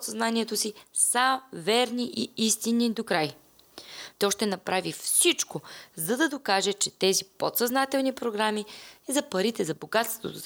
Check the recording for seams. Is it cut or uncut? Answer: cut